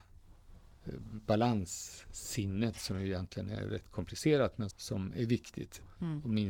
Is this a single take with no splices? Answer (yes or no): no